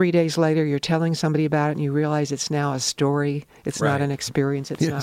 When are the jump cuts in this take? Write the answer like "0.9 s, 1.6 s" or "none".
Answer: none

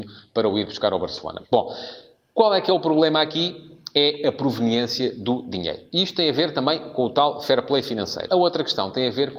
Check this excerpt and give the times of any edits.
8.3 s

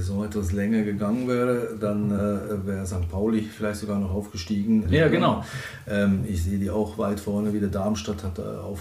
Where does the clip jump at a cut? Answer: 4.9 s

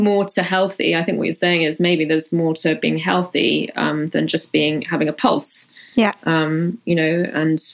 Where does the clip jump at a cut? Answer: none

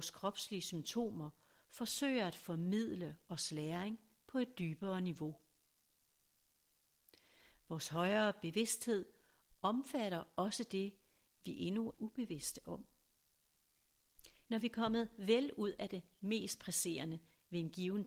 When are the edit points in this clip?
11.9 s, 14.5 s

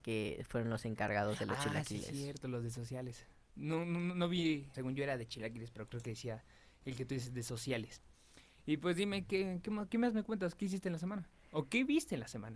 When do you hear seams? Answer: 4.7 s

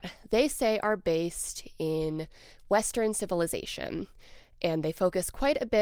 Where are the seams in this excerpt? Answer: none

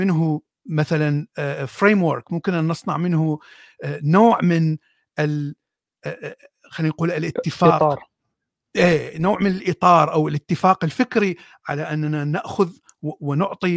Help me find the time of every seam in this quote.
11.6 s

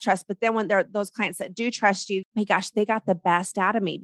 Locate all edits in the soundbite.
2.2 s

